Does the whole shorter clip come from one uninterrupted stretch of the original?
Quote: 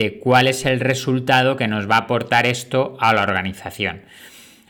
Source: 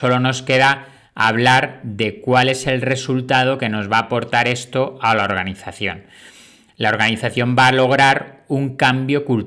yes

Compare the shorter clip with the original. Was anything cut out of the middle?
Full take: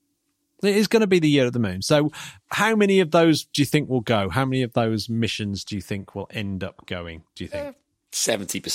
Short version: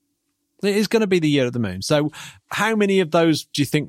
no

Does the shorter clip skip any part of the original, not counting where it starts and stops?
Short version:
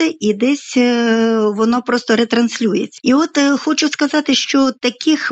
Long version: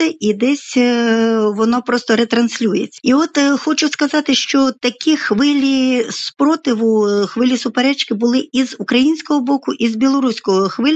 no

